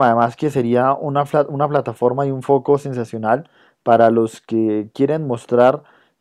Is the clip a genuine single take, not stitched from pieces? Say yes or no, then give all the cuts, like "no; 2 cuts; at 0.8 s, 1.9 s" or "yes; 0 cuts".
yes; 0 cuts